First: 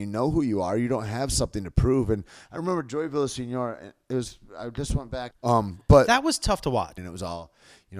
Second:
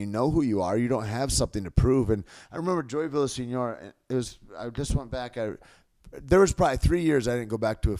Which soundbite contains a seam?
first; 2 cuts; at 5.3 s, 7.0 s

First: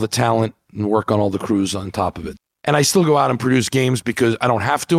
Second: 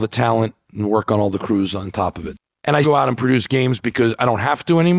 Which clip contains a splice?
second; 1 cut; at 2.8 s

